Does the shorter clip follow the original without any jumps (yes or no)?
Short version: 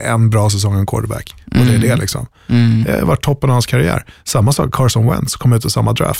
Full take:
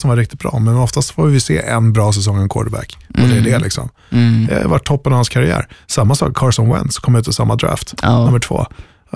yes